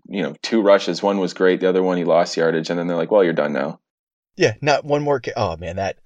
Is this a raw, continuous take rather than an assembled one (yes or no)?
yes